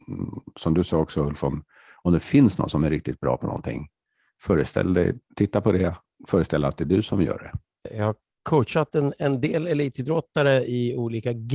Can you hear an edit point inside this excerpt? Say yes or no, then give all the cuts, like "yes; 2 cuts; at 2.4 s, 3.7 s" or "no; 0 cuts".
no; 0 cuts